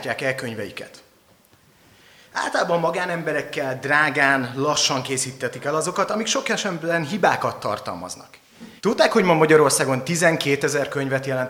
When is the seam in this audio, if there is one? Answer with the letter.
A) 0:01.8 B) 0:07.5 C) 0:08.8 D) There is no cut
C